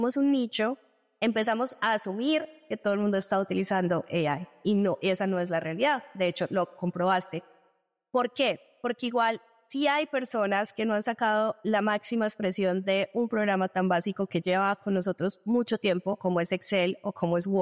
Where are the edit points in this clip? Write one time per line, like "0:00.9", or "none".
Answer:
none